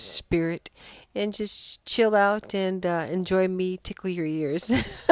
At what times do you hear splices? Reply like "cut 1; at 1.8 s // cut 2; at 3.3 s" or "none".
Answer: none